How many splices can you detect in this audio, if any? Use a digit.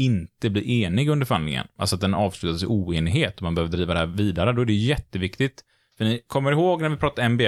0